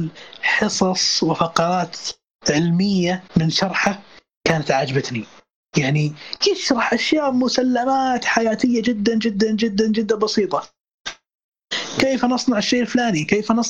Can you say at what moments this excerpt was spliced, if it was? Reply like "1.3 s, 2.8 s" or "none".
3.3 s